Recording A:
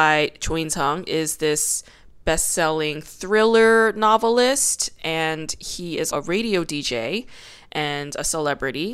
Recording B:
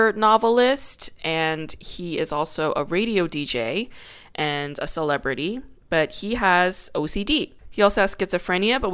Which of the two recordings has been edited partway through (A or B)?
A